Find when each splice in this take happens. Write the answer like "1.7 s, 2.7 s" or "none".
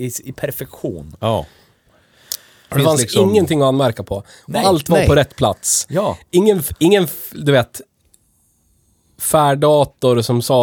none